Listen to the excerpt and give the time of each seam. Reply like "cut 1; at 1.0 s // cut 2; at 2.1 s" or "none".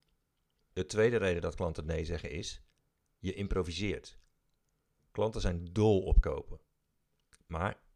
cut 1; at 5.1 s

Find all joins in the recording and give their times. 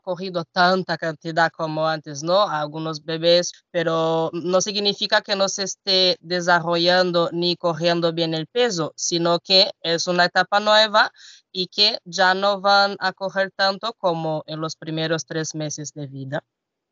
cut 1; at 3.5 s

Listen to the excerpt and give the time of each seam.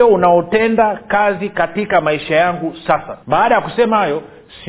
cut 1; at 3.2 s

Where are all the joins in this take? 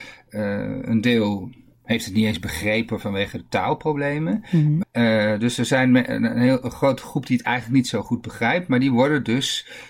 cut 1; at 4.8 s

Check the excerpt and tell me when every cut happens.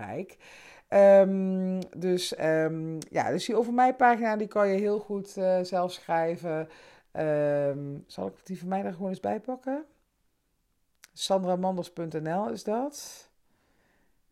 none

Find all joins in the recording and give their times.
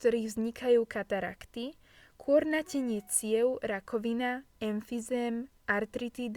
none

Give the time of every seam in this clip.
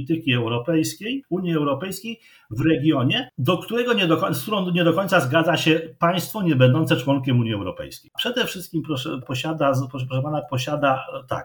cut 1; at 8.1 s // cut 2; at 9.2 s

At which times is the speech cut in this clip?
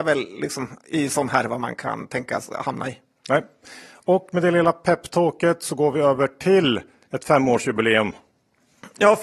none

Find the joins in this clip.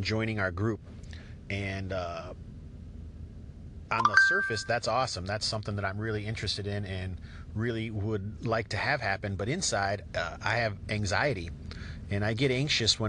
none

